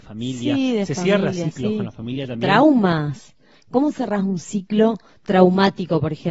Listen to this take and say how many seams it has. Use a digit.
0